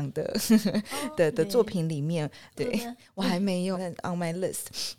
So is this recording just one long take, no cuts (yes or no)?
no